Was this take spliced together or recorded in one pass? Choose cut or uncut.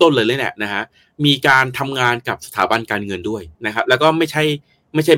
cut